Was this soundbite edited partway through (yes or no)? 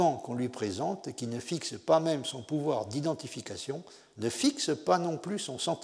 no